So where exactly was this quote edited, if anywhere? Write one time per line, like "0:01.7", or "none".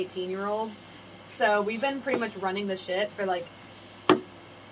0:01.3